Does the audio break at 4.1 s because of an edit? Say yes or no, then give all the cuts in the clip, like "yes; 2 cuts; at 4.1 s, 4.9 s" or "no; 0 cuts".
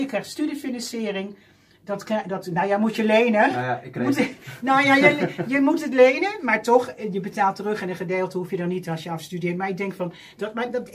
no; 0 cuts